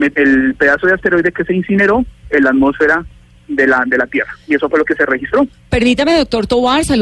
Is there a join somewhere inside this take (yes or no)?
no